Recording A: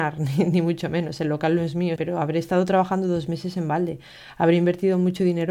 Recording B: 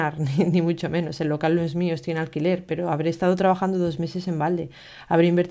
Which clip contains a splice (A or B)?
A